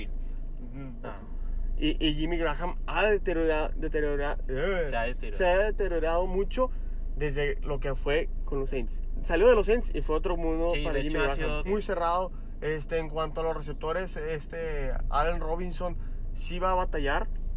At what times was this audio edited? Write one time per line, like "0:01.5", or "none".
0:01.0
0:11.6